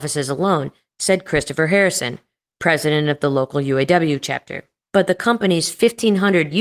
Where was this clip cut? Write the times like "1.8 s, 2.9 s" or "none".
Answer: 4.9 s